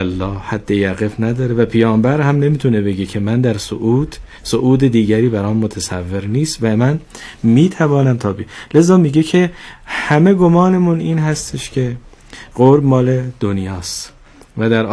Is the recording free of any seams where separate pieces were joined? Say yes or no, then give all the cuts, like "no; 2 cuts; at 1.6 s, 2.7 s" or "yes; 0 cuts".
yes; 0 cuts